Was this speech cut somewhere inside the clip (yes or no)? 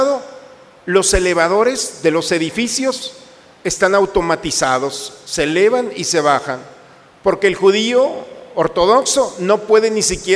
no